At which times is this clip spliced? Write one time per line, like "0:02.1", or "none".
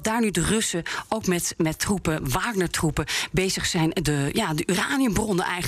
none